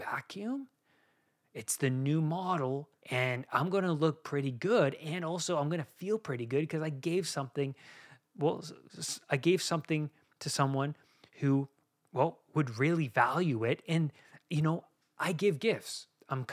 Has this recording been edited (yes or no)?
yes